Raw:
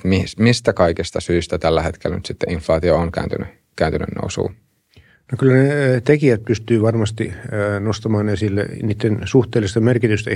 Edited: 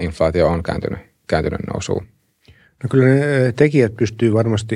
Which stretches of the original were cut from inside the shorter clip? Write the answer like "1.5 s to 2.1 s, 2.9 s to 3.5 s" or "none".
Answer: none